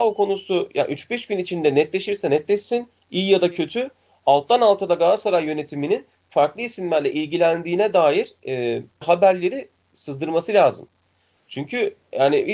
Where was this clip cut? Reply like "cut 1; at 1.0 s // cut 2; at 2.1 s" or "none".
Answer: cut 1; at 9.0 s

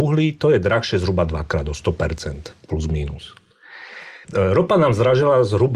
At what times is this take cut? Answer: cut 1; at 4.2 s

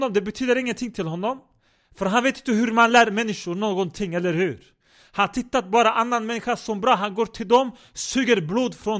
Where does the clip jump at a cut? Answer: none

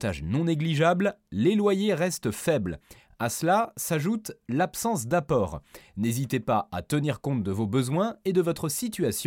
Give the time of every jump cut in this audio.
none

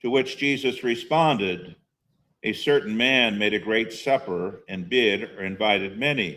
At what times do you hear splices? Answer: none

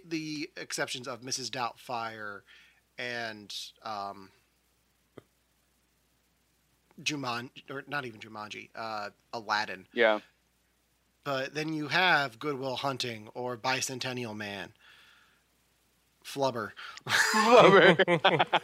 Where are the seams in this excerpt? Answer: none

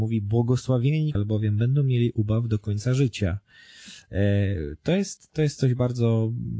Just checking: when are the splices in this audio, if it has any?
cut 1; at 1.1 s

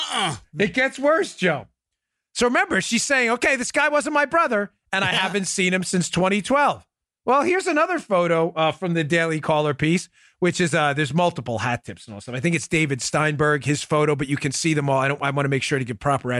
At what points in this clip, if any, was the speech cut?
none

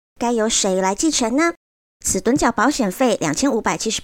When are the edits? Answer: cut 1; at 1.9 s

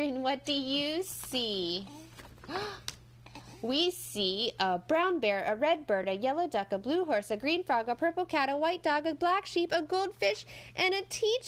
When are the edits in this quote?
none

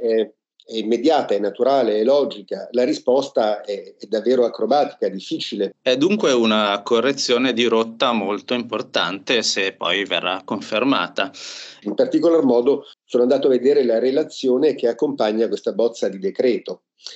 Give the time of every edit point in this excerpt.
cut 1; at 5.7 s // cut 2; at 11.8 s // cut 3; at 12.9 s

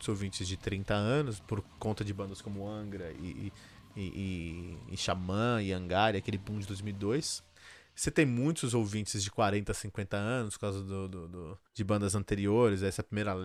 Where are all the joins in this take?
cut 1; at 1.4 s // cut 2; at 11.7 s

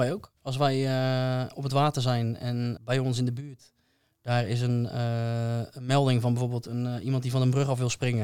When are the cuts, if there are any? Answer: cut 1; at 2.8 s

